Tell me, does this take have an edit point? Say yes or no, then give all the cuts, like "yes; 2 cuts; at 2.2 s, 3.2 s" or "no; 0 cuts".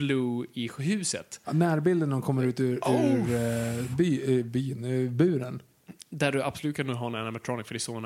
no; 0 cuts